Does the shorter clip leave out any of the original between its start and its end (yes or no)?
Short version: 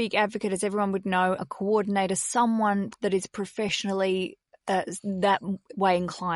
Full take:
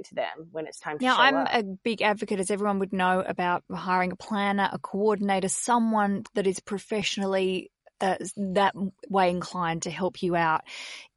yes